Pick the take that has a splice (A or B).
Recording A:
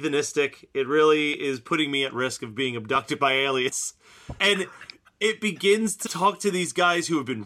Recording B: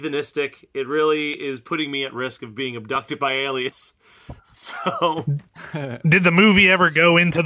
A